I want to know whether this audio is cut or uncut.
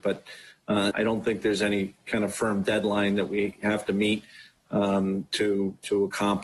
cut